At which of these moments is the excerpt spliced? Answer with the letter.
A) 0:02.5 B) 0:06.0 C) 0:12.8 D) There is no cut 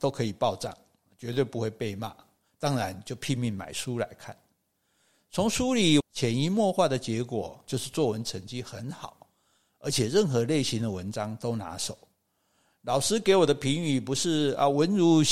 B